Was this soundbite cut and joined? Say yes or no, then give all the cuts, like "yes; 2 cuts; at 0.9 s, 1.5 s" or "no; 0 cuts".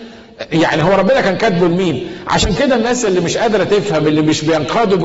no; 0 cuts